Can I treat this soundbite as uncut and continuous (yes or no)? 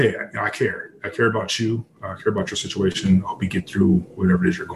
yes